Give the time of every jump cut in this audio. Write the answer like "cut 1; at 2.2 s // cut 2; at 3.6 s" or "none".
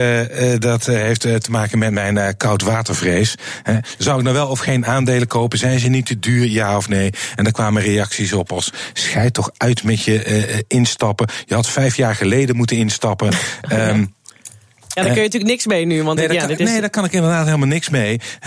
cut 1; at 3.9 s